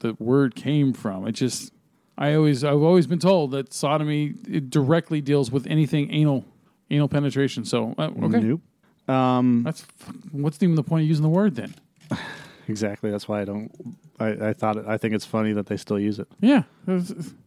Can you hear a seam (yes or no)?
no